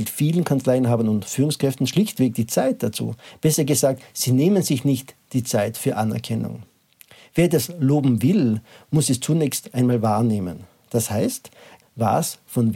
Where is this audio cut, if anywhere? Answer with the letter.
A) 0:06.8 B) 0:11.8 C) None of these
B